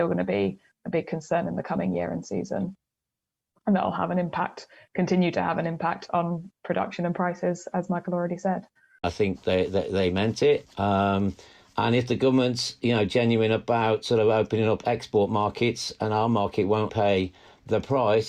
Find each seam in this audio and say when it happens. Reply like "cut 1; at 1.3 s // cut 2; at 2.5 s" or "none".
cut 1; at 9.0 s // cut 2; at 10.6 s // cut 3; at 16.9 s